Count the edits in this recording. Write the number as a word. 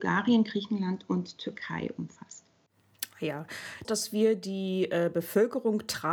one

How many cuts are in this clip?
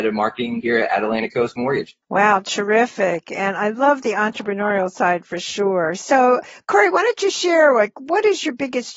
zero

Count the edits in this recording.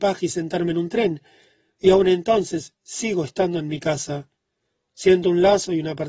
zero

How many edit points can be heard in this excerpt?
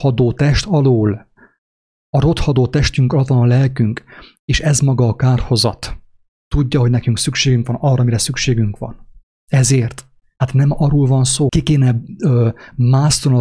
three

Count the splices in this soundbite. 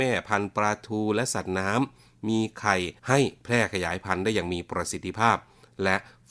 one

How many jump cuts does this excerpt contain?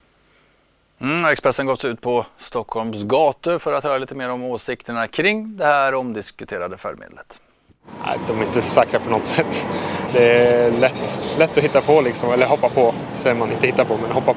one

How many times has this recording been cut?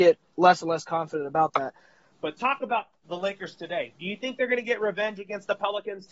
one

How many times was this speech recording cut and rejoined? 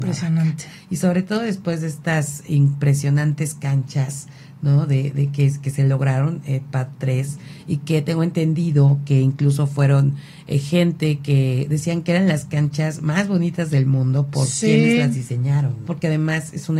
one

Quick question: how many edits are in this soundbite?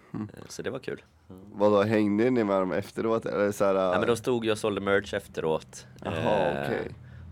zero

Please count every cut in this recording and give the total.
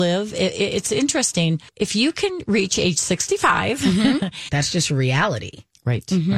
two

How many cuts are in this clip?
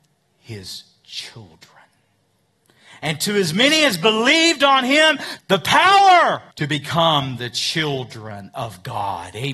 two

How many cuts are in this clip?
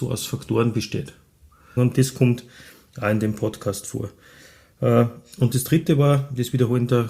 one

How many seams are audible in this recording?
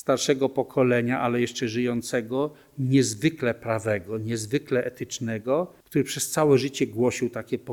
one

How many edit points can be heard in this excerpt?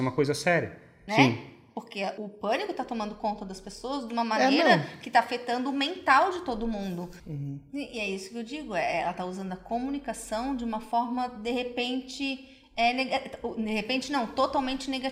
three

